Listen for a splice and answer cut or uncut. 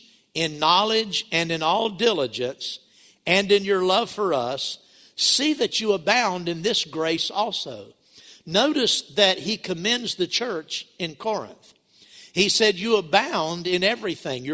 uncut